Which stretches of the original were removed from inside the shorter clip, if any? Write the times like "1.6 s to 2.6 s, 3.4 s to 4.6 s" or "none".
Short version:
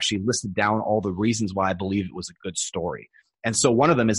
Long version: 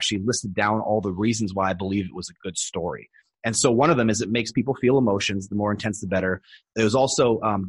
none